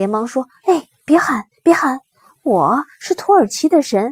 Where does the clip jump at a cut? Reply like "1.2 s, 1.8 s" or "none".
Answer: none